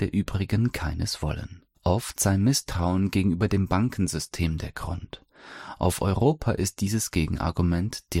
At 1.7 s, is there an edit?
yes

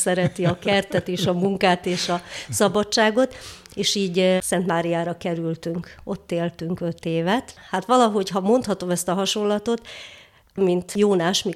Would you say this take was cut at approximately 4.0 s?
no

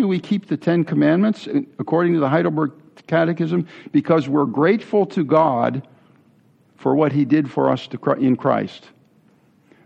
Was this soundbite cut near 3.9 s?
no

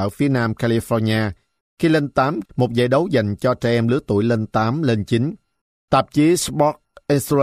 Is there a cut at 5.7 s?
yes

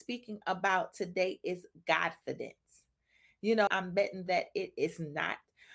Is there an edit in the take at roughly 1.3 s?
no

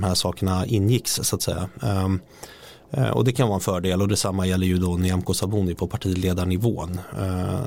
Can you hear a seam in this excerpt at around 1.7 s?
no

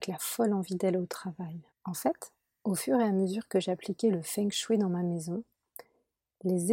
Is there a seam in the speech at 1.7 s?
yes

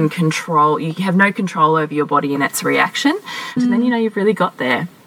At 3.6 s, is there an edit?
yes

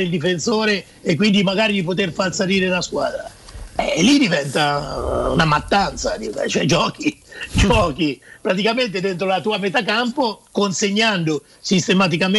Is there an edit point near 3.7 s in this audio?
no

